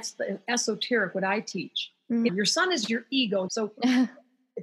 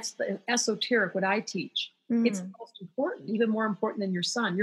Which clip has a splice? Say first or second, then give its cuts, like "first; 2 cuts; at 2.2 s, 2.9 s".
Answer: first; 2 cuts; at 2.3 s, 3.5 s